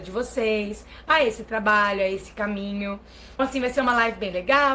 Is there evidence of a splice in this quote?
yes; 1 cut; at 3.4 s

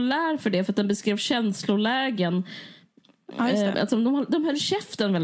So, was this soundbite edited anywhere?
yes; 1 cut; at 3.7 s

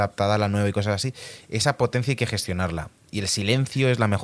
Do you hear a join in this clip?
no; 0 cuts

